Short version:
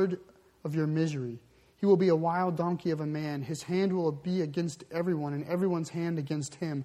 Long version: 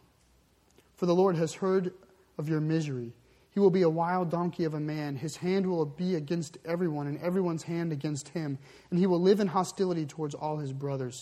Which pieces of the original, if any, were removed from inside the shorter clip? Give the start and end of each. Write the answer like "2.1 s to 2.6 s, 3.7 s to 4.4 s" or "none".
none